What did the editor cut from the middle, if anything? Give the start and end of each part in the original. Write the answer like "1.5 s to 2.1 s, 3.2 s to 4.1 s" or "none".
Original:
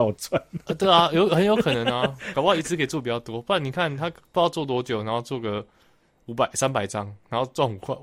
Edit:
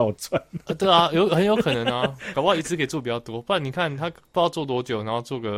none